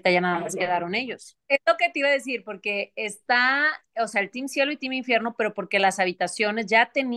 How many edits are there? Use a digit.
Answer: 1